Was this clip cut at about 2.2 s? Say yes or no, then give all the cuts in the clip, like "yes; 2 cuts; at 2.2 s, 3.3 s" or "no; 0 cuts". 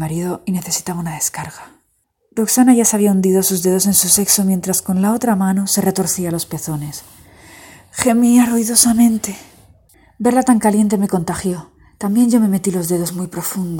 no; 0 cuts